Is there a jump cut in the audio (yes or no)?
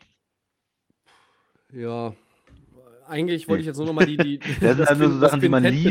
no